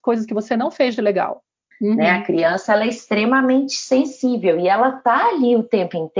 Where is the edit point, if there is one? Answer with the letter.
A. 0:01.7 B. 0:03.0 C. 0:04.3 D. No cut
A